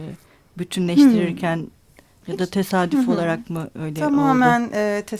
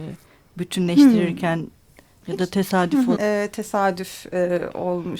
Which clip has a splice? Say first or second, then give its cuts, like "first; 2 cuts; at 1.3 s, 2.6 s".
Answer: second; 1 cut; at 3.2 s